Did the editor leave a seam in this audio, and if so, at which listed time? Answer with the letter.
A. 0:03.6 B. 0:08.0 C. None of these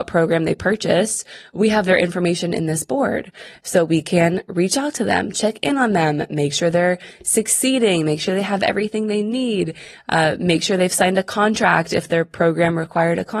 C